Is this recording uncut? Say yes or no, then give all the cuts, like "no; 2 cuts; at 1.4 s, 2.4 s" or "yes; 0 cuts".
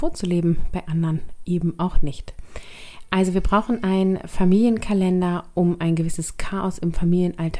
yes; 0 cuts